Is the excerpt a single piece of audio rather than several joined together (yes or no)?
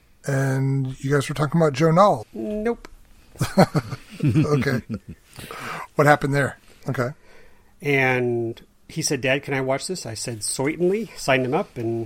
no